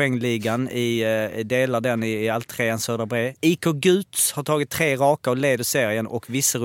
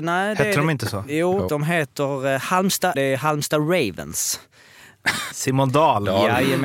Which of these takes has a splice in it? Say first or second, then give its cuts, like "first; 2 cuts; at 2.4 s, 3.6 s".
second; 3 cuts; at 1.5 s, 2.9 s, 5.3 s